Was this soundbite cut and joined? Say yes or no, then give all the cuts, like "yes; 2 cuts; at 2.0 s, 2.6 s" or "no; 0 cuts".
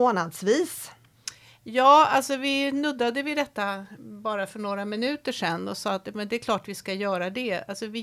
no; 0 cuts